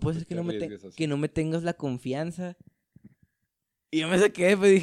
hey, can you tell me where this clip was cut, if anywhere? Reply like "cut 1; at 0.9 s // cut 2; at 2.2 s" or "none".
none